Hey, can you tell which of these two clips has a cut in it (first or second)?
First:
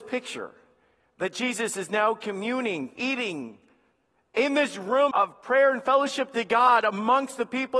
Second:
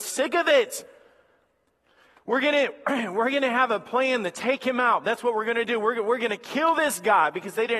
first